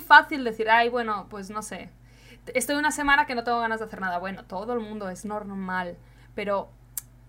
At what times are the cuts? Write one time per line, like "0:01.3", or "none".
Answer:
none

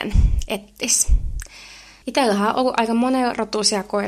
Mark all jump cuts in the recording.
0:02.0

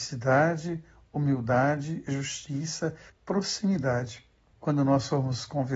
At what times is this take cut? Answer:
0:03.1
0:04.5

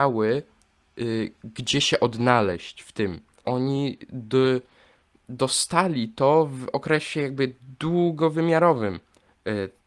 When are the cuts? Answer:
0:03.4

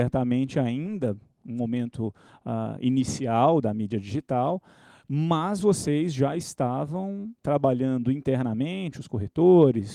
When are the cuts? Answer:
none

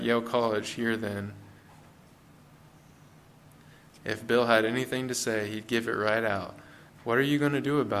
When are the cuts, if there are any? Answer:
0:04.0
0:06.9

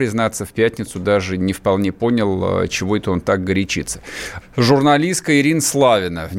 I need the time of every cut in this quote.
0:04.4

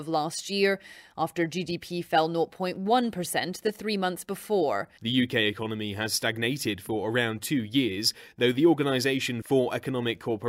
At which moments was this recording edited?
0:05.0

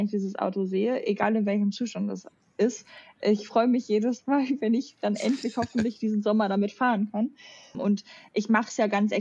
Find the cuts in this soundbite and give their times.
0:07.7

